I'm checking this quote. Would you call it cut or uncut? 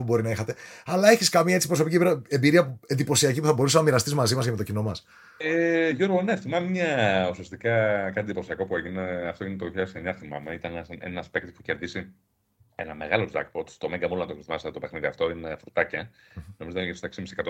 uncut